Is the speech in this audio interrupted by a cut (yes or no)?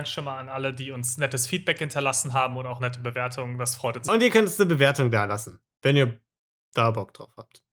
yes